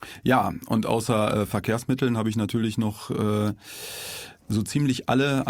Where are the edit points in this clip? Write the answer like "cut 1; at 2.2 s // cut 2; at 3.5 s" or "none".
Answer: none